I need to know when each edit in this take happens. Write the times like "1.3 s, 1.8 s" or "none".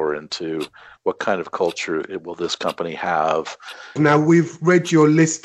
1.0 s, 4.0 s